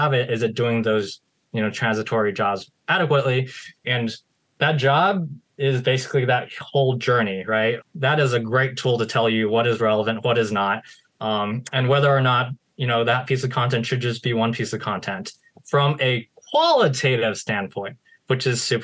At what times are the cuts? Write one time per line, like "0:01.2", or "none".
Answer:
0:03.8
0:07.8